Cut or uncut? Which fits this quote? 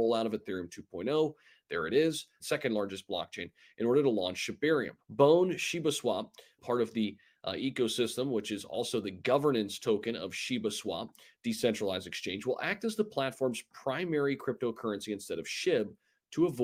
cut